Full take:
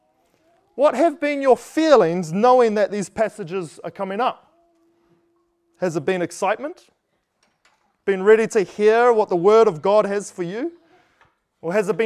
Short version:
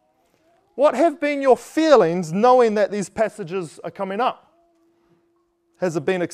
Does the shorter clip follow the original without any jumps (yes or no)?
yes